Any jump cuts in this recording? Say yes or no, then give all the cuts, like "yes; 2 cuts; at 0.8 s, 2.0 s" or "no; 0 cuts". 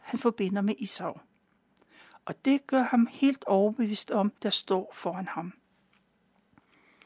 yes; 1 cut; at 4.4 s